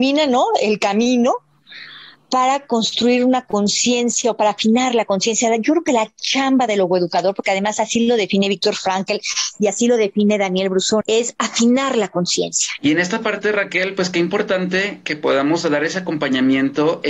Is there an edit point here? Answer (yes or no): yes